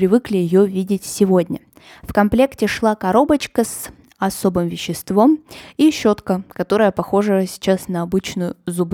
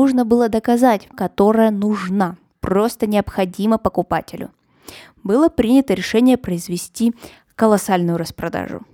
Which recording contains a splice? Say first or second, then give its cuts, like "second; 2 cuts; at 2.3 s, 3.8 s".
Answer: second; 1 cut; at 1.1 s